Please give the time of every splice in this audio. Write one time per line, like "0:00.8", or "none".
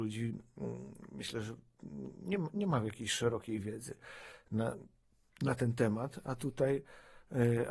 none

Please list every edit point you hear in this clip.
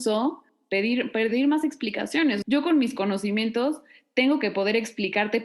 0:02.4

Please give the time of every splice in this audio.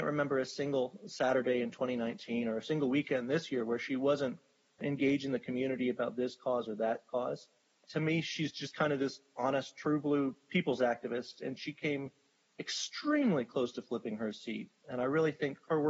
none

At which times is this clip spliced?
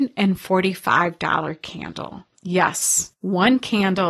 0:03.2

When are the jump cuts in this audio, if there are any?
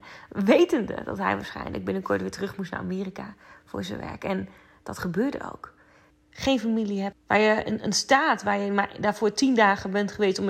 0:06.1
0:07.1

